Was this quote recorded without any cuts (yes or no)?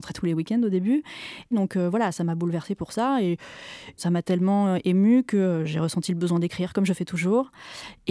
no